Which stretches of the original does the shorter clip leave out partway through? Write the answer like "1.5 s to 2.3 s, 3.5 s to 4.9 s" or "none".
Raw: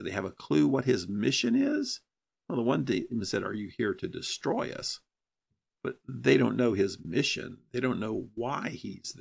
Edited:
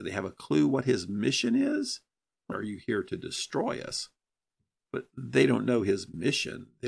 2.5 s to 3.4 s